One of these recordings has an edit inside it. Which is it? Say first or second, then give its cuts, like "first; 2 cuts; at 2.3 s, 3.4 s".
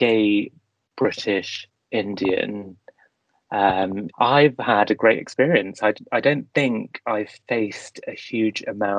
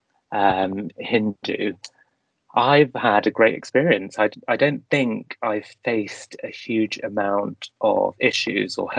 first; 1 cut; at 4.1 s